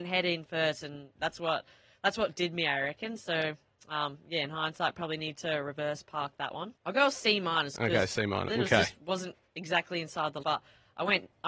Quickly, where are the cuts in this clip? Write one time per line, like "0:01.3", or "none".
0:06.7
0:08.5
0:10.4